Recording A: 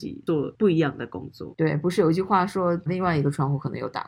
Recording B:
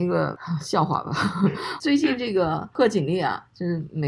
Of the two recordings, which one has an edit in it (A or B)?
A